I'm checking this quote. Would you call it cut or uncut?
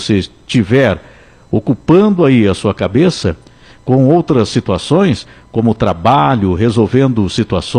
uncut